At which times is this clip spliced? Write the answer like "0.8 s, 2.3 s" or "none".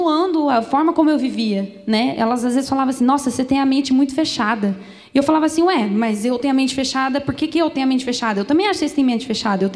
none